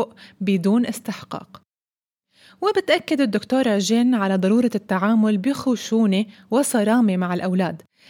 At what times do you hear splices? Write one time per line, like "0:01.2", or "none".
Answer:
none